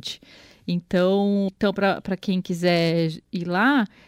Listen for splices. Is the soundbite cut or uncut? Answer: cut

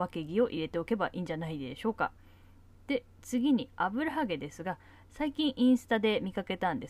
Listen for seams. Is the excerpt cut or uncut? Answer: uncut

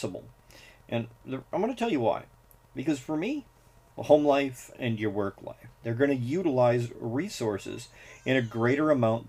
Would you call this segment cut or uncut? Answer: cut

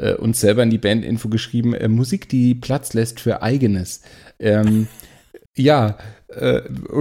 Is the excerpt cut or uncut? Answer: cut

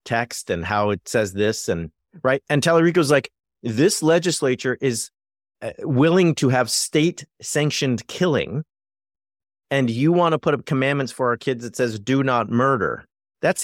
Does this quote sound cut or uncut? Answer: uncut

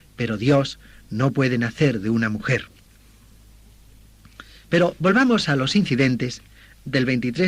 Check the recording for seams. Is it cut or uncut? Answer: uncut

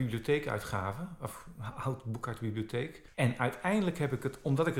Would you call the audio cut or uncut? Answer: cut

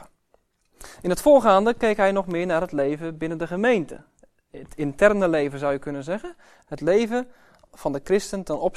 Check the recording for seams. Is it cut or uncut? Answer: cut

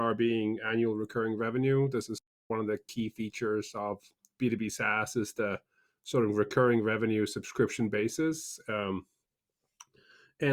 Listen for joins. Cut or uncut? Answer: uncut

